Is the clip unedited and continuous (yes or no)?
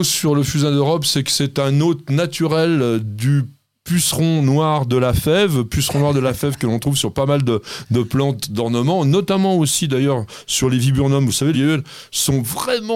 no